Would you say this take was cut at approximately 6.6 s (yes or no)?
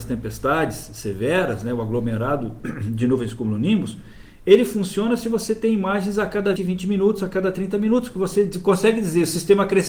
yes